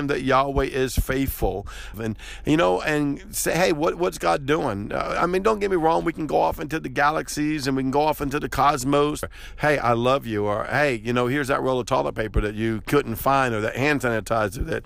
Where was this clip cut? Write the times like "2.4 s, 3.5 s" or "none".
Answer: 1.9 s, 9.2 s